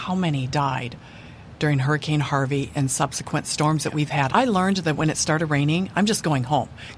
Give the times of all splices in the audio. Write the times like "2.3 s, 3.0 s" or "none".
4.3 s